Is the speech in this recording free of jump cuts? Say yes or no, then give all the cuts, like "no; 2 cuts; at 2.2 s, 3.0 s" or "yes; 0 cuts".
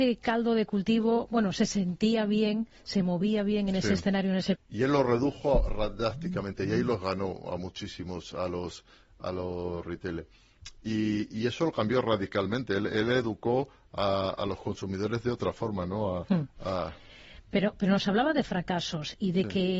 no; 1 cut; at 4.5 s